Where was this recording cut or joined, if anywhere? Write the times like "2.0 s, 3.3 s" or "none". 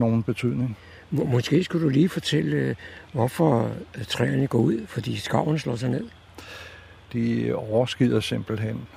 7.1 s